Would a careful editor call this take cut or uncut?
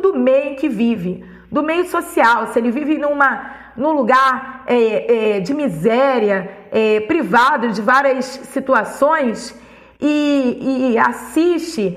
uncut